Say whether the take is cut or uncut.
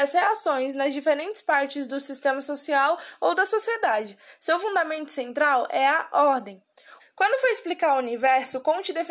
cut